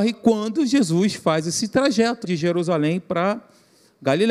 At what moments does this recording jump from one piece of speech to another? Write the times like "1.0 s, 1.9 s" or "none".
2.2 s